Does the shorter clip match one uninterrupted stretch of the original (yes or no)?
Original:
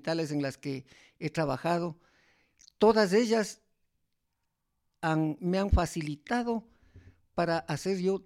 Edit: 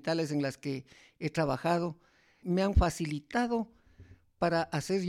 no